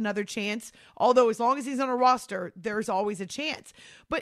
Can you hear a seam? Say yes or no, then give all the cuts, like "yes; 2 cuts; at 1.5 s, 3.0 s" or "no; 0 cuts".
no; 0 cuts